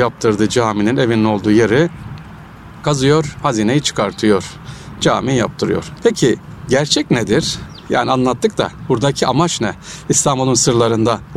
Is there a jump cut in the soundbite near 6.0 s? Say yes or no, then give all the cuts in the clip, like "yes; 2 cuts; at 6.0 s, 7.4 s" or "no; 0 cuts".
yes; 1 cut; at 6.0 s